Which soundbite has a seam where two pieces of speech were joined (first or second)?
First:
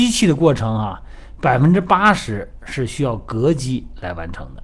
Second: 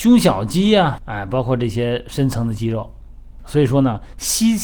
second